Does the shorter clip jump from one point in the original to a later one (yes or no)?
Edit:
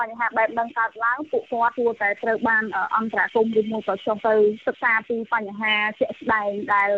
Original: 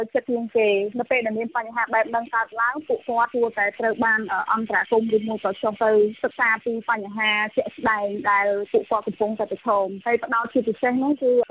no